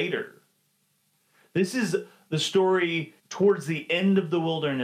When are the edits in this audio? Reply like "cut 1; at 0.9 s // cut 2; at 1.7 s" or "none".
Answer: cut 1; at 3.2 s